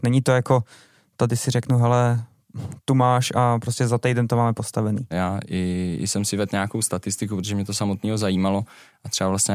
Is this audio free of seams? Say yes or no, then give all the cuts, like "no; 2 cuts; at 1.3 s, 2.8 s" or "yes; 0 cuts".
no; 1 cut; at 5.1 s